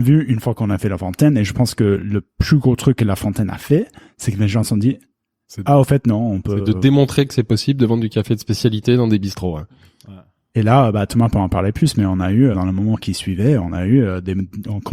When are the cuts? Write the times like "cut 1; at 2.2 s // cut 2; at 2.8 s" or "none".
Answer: cut 1; at 12.5 s